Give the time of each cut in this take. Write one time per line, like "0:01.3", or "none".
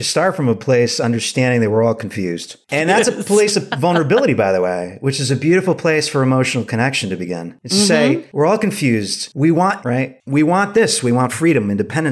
0:09.8